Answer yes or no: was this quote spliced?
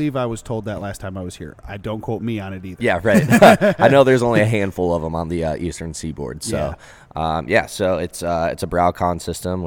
no